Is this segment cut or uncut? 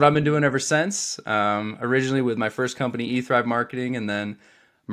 uncut